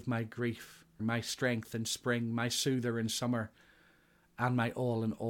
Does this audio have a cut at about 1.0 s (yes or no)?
yes